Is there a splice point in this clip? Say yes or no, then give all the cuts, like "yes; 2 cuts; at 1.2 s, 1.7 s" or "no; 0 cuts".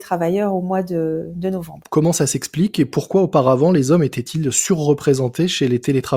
yes; 1 cut; at 1.8 s